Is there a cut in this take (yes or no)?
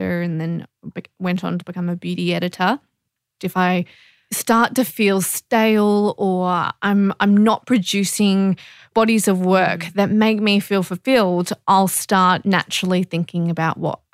yes